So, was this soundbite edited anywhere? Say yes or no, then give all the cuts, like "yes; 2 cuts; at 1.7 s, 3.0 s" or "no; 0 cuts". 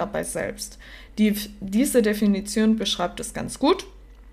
no; 0 cuts